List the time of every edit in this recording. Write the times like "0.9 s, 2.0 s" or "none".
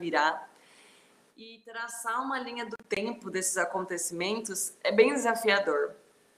4.8 s